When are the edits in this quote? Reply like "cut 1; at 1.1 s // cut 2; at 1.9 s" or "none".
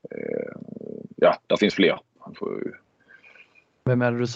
cut 1; at 2.2 s